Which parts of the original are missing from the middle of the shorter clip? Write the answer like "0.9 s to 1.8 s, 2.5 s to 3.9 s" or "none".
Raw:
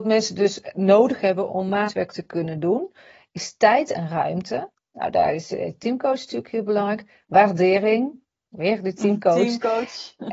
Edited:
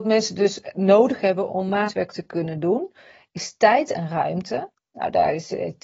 none